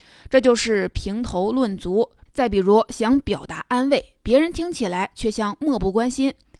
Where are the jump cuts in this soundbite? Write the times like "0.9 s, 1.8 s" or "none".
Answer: 2.3 s